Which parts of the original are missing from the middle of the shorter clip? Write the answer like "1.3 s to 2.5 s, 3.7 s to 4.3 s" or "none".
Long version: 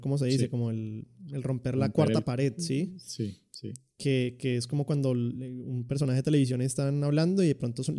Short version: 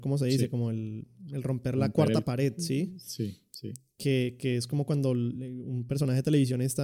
none